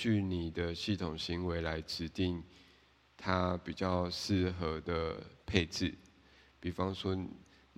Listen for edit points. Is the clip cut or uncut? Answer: uncut